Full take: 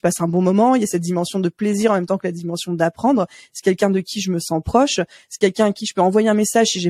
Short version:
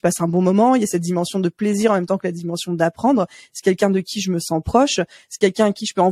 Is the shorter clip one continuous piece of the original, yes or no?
yes